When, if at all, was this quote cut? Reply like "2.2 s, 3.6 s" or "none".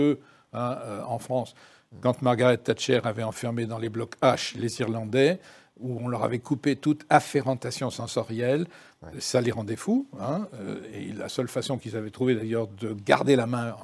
none